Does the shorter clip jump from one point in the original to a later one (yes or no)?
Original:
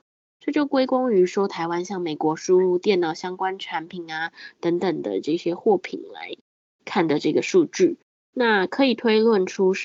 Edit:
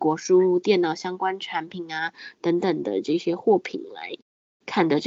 no